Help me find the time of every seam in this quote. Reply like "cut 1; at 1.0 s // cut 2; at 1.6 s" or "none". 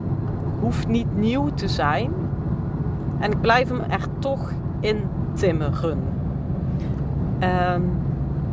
none